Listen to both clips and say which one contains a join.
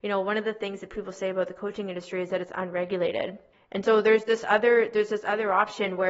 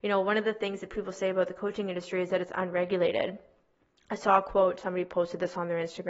first; 1 cut; at 3.5 s

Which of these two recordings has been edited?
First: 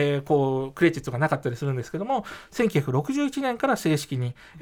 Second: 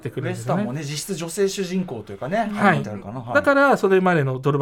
second; 1 cut; at 2.8 s

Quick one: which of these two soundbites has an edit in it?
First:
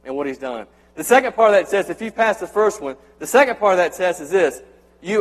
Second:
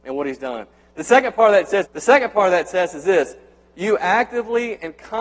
second; 1 cut; at 1.8 s

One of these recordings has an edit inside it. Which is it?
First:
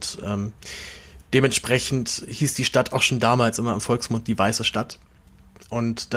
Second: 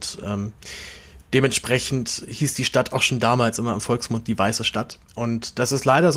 second; 1 cut; at 5.1 s

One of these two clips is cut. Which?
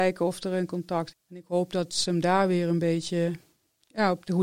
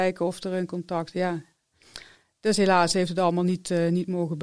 first; 1 cut; at 1.1 s

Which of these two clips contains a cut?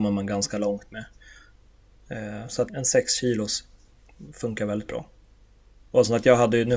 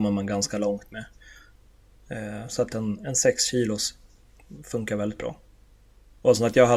first; 1 cut; at 2.7 s

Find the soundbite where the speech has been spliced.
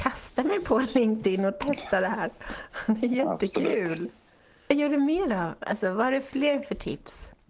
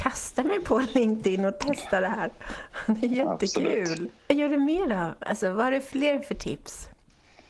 second; 1 cut; at 4.2 s

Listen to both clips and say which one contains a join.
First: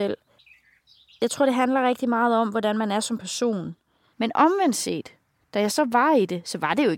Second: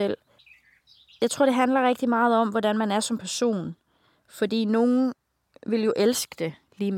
first; 1 cut; at 4.1 s

